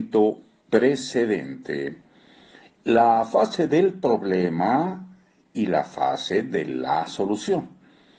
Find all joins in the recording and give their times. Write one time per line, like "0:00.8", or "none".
0:02.6